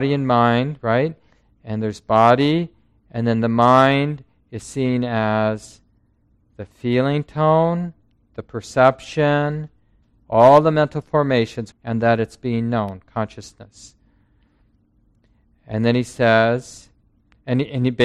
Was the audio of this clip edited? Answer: yes; 1 cut; at 11.7 s

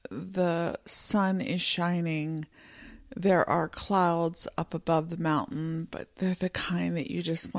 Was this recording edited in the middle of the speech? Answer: no; 0 cuts

